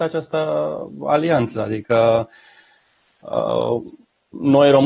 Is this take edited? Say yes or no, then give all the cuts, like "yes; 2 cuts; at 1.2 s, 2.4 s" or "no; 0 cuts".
no; 0 cuts